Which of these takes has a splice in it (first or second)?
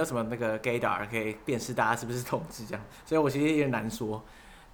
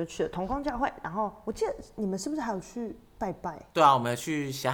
second